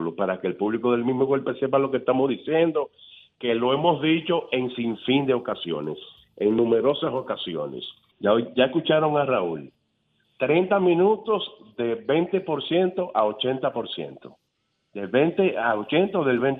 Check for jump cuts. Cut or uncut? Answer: cut